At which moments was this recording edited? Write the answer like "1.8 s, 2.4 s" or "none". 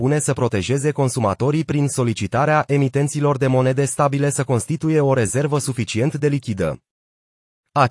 none